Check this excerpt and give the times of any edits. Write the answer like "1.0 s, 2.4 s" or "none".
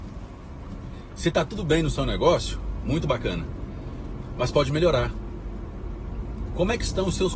2.8 s